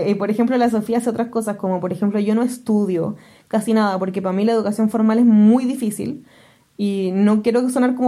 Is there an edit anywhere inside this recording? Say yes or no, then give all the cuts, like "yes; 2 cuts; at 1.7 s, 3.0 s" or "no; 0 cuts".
no; 0 cuts